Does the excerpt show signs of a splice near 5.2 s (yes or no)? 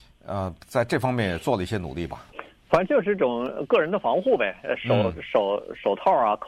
no